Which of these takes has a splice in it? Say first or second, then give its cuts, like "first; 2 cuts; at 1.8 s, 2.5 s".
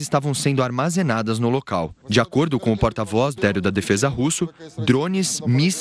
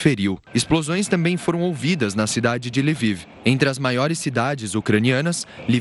first; 1 cut; at 3.4 s